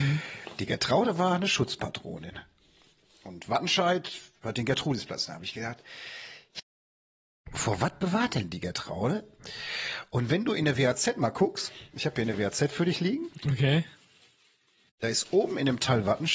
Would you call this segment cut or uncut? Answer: uncut